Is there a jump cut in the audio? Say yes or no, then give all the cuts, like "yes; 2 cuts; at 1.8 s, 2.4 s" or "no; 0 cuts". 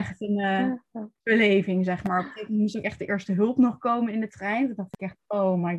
no; 0 cuts